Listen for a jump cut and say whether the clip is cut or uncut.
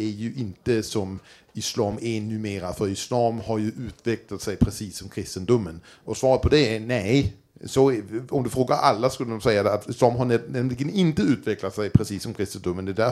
uncut